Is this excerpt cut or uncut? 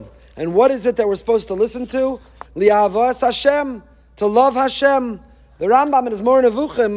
cut